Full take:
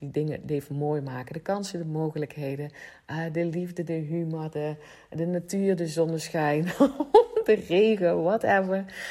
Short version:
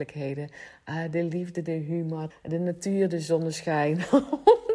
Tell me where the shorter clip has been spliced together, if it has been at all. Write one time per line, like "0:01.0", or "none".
0:02.3